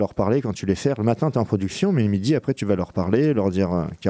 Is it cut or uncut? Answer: uncut